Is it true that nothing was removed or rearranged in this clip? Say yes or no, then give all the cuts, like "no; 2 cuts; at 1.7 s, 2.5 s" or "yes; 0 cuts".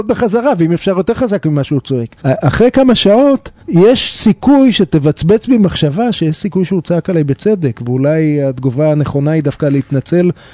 no; 2 cuts; at 2.2 s, 3.6 s